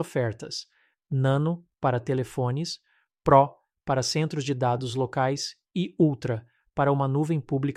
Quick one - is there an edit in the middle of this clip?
no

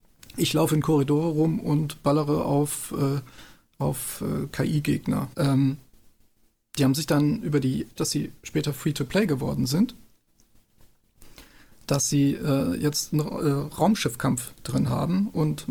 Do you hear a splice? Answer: yes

